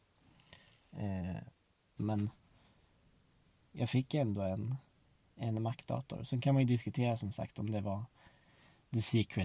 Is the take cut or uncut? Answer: cut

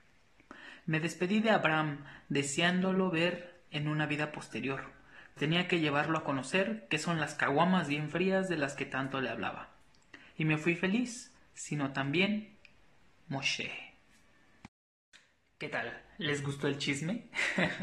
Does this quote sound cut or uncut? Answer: cut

